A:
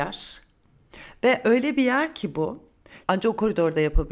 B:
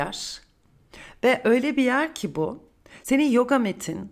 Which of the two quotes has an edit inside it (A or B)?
A